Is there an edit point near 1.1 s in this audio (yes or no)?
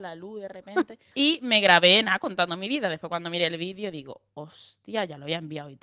yes